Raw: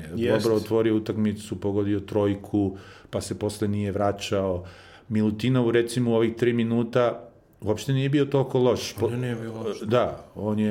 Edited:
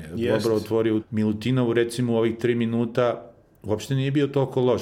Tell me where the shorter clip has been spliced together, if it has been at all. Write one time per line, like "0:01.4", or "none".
0:01.0